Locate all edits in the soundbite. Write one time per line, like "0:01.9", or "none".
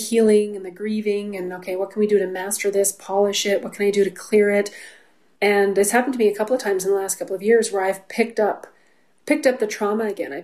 0:05.4